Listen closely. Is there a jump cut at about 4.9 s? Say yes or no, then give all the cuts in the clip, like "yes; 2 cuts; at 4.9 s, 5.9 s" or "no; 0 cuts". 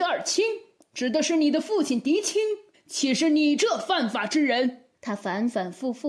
yes; 1 cut; at 4.9 s